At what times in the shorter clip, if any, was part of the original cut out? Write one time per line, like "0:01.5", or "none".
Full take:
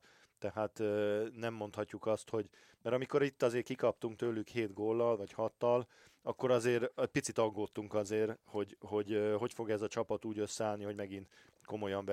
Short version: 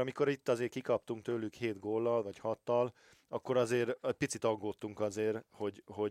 none

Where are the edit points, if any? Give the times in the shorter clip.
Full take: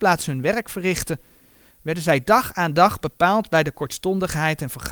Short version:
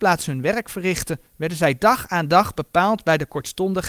0:01.3

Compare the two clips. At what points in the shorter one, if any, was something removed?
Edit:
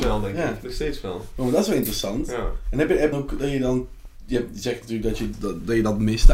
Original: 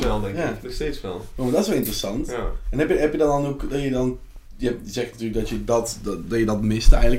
0:03.1
0:05.3

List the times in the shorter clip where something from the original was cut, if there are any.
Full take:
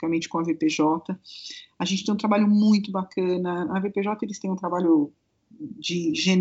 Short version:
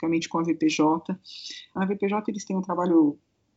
0:01.8

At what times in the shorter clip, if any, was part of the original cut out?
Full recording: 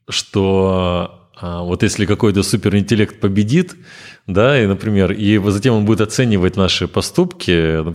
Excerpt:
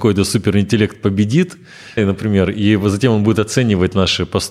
0:02.0

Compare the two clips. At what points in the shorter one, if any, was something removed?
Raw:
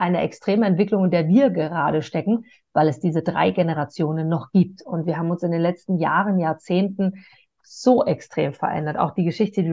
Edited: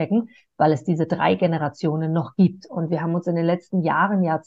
none

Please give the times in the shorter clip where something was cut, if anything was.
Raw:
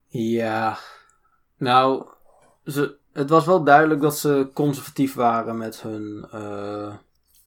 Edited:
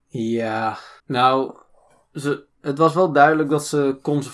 0:01.0

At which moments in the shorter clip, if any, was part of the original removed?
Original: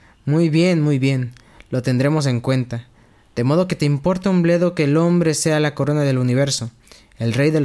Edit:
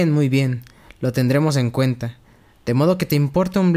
none

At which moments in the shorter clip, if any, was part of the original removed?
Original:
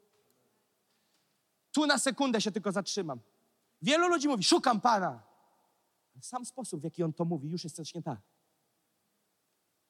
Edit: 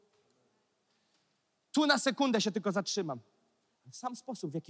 0:03.7

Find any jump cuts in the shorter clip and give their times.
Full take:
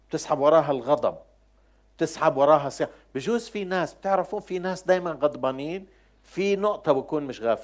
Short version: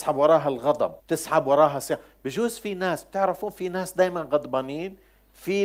0:01.0

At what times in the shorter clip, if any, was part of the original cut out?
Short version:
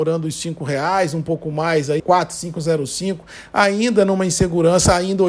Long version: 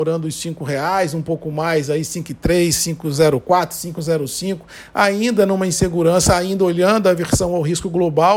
0:02.0

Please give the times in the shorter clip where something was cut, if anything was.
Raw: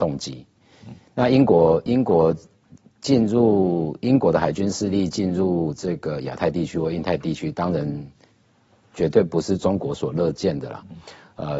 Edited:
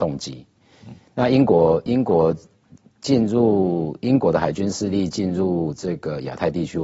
none

